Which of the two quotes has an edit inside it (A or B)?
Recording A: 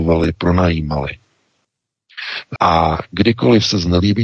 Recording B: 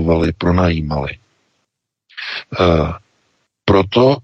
A